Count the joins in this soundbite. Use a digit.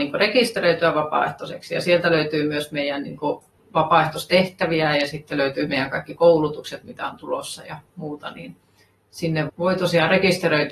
1